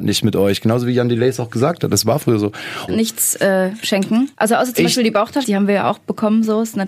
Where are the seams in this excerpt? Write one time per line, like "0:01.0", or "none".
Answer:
0:02.9
0:04.3
0:05.4